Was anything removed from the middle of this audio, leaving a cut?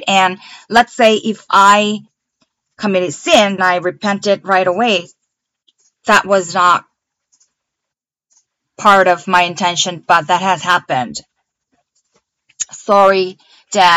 yes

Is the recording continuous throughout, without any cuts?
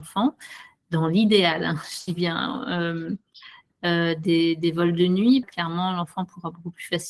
no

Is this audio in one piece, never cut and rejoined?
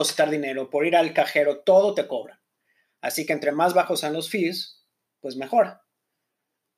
yes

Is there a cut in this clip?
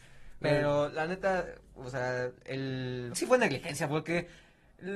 yes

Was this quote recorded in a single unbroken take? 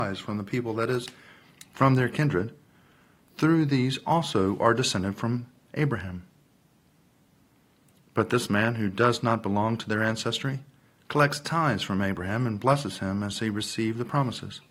yes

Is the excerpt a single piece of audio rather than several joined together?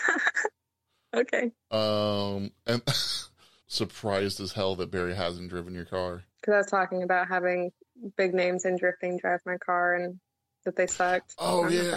no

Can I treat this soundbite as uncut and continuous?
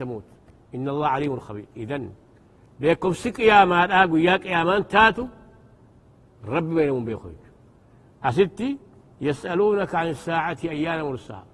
yes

